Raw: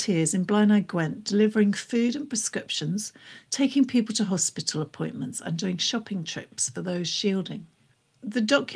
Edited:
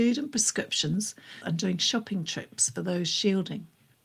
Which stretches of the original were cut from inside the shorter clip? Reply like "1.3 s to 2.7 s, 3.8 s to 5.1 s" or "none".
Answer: 3.4 s to 5.4 s